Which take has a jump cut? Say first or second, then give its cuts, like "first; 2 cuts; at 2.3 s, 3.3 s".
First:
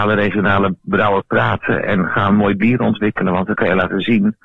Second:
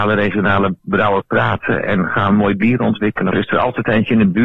second; 1 cut; at 3.3 s